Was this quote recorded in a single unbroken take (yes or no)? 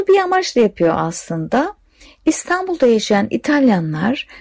yes